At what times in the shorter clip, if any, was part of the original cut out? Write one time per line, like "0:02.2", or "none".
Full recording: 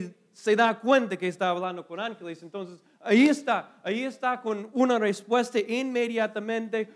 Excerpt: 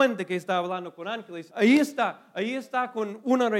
0:01.5